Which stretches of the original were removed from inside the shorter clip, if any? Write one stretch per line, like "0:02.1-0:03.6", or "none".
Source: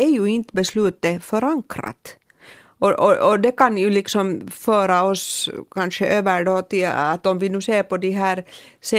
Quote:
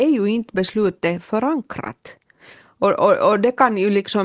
none